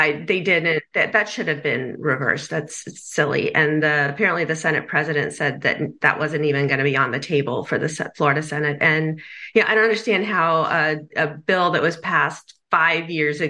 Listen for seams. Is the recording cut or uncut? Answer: uncut